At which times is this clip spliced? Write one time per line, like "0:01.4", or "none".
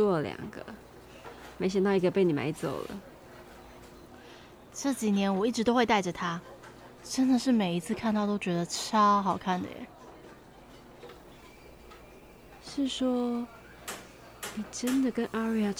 none